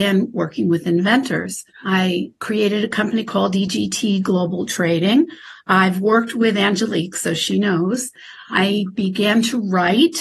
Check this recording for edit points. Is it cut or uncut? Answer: uncut